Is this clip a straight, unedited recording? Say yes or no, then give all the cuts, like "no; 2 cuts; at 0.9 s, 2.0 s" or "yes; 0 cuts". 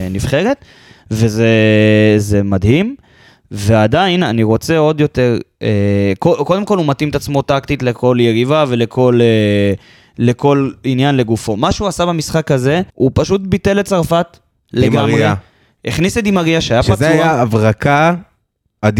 no; 1 cut; at 12.9 s